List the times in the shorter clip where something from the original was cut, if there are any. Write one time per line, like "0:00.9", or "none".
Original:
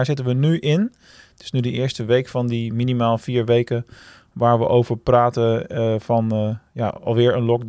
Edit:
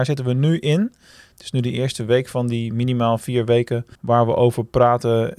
0:04.0